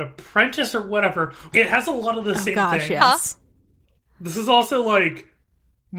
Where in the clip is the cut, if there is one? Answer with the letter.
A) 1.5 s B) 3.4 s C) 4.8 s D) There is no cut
A